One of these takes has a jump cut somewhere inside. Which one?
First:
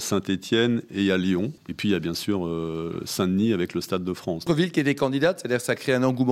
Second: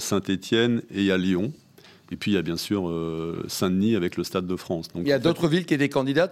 first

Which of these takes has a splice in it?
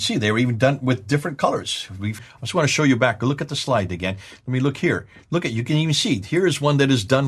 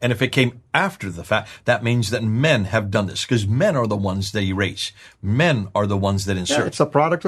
first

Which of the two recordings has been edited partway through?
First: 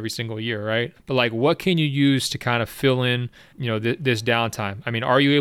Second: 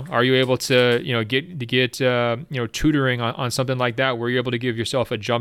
first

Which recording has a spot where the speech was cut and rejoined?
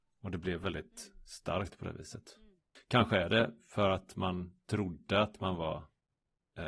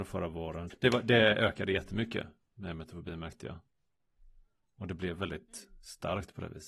first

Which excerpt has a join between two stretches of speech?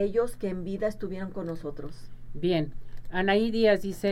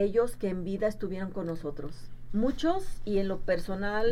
second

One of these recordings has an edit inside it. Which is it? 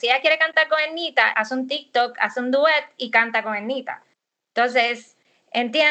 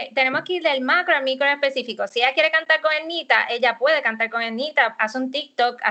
first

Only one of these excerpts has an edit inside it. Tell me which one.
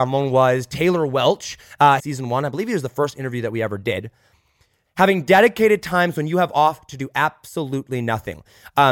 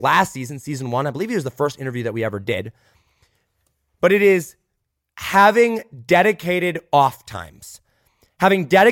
first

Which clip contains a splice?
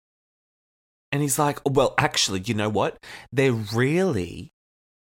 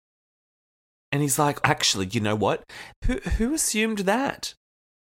second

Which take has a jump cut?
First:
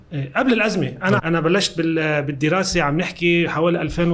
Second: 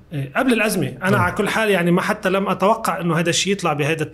first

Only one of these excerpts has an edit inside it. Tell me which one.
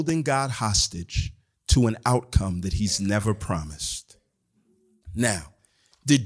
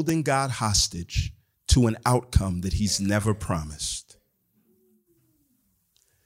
first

